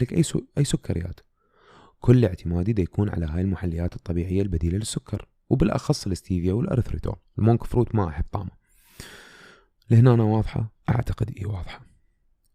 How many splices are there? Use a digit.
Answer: 1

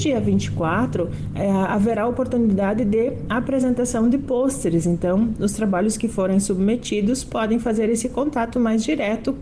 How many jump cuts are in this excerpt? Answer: 0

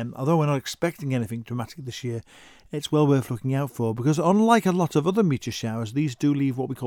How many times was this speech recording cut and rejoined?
0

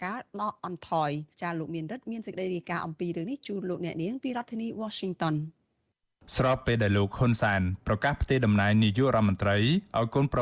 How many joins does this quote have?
1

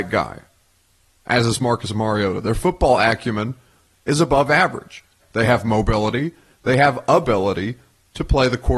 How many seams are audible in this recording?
1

